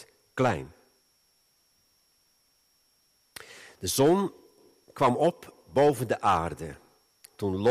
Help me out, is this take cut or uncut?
uncut